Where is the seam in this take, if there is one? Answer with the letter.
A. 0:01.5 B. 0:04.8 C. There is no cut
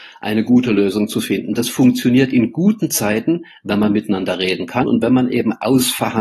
B